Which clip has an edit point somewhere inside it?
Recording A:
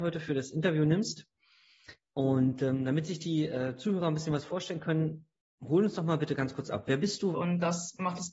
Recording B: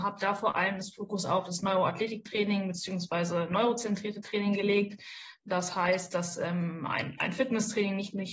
A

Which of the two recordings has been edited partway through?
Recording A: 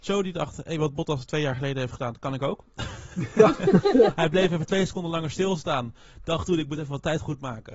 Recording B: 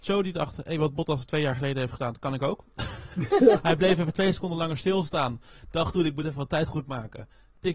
B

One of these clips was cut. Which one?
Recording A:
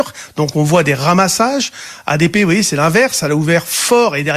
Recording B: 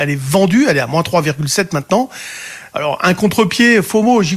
B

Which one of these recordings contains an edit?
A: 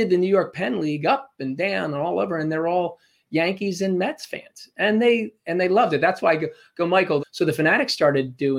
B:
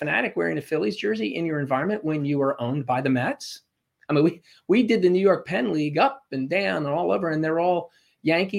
A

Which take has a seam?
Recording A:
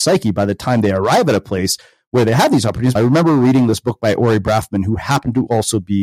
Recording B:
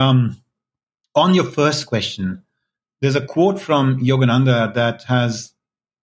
A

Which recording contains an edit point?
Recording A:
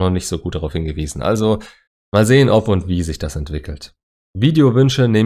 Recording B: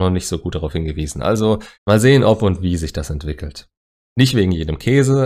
B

